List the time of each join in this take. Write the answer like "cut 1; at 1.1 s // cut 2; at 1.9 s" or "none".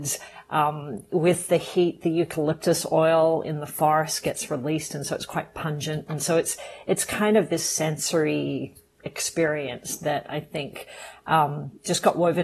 none